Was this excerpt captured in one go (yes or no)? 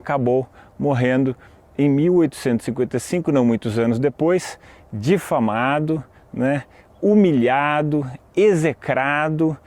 yes